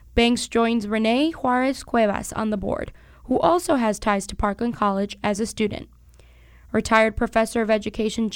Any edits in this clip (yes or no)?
no